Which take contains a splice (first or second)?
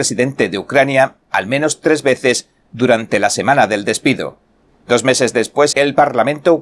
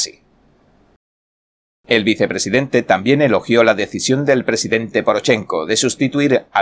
first